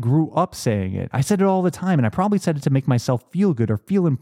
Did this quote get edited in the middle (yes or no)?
no